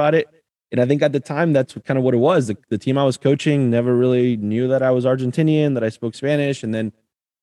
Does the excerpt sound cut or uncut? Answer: uncut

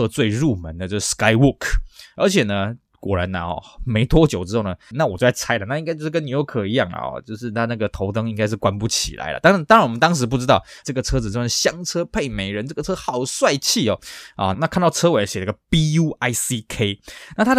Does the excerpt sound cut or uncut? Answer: cut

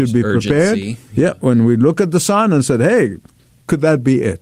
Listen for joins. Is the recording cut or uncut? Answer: uncut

